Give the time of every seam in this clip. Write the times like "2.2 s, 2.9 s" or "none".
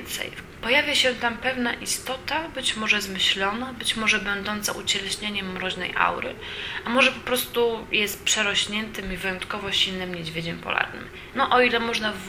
11.3 s